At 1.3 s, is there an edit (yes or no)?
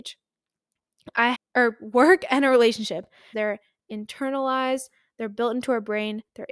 yes